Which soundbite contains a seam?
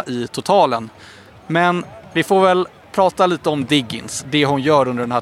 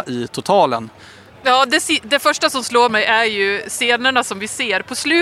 second; 1 cut; at 1.3 s

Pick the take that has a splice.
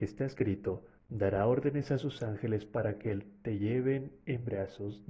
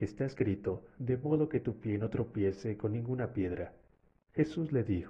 second; 1 cut; at 1.0 s

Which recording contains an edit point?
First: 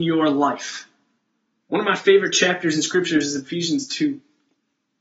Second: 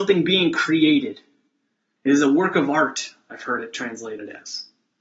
first; 1 cut; at 1.6 s

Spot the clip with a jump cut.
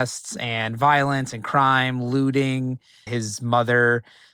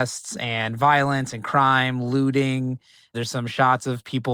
first; 1 cut; at 3.1 s

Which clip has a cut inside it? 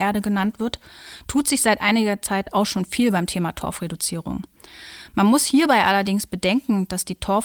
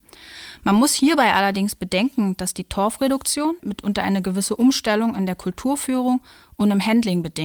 second; 1 cut; at 3.6 s

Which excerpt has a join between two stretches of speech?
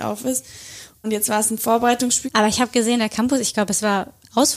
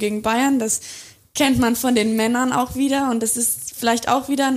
first; 2 cuts; at 1.0 s, 2.2 s

